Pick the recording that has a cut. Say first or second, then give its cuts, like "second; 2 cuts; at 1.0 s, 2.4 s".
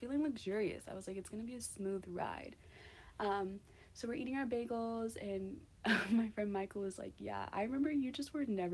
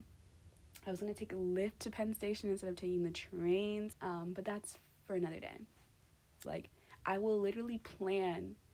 second; 2 cuts; at 3.9 s, 6.4 s